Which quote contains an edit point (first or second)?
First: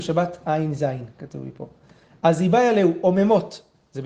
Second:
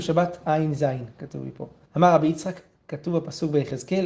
second